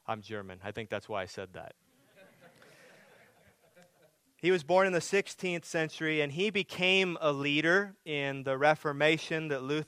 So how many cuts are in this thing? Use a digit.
0